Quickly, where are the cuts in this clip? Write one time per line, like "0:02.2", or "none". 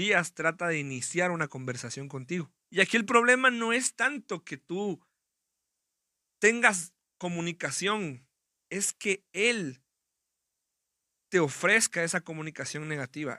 0:02.6